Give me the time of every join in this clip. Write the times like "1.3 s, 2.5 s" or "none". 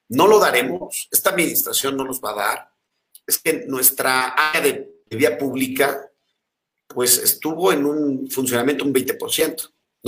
3.1 s, 5.1 s